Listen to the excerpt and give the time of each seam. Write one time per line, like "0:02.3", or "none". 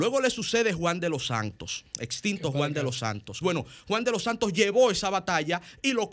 0:01.9
0:03.4